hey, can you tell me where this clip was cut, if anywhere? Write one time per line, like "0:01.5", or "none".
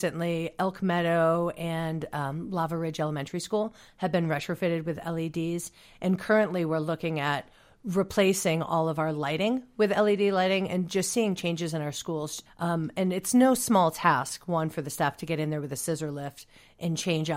0:12.5